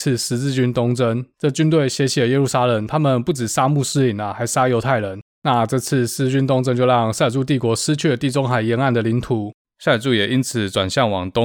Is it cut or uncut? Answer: uncut